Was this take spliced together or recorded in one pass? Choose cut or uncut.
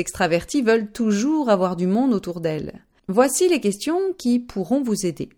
cut